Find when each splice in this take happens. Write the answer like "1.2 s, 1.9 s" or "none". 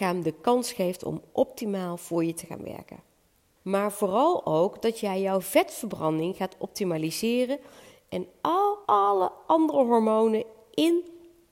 3.6 s, 8.8 s